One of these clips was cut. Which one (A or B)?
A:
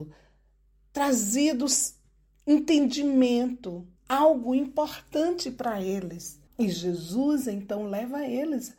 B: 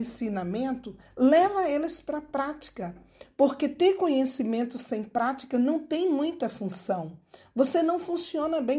A